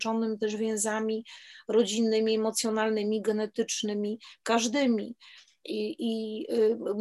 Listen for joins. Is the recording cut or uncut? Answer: uncut